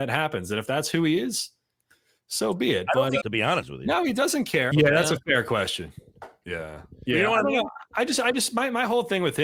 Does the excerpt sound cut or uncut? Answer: cut